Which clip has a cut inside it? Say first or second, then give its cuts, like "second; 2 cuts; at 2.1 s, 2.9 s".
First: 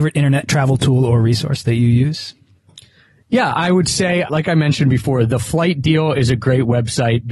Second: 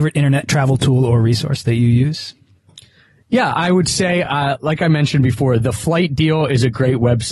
first; 1 cut; at 4.3 s